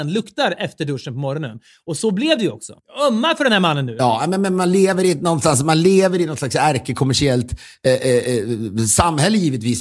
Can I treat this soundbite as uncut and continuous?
yes; 0 cuts

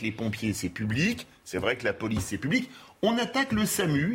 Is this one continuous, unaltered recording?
yes; 0 cuts

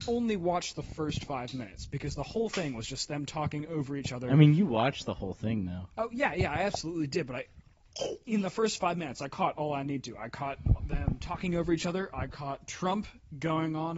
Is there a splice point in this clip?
no; 0 cuts

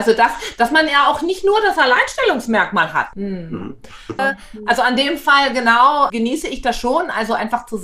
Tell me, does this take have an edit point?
yes; 3 cuts; at 3.1 s, 4.2 s, 6.1 s

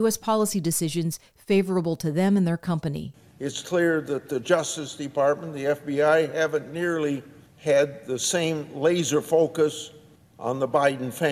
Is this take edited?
no; 0 cuts

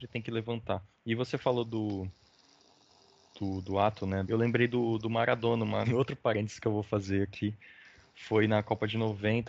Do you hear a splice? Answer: yes; 2 cuts; at 4.2 s, 5.8 s

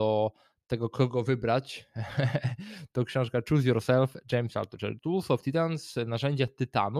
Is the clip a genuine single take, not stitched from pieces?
no; 1 cut; at 5.0 s

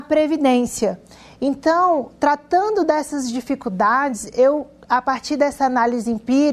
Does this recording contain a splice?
no; 0 cuts

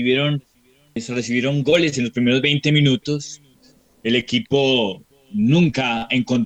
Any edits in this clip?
yes; 1 cut; at 1.0 s

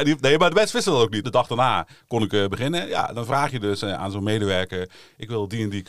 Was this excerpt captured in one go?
no; 1 cut; at 1.2 s

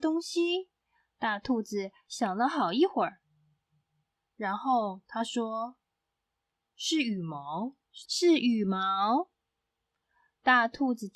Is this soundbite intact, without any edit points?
no; 1 cut; at 8.0 s

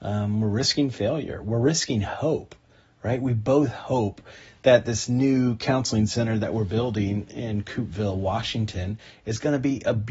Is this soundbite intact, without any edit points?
yes; 0 cuts

